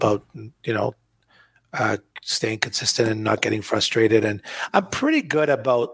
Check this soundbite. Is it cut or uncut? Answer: uncut